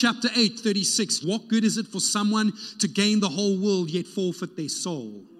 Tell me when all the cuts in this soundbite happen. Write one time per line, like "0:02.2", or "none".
0:01.2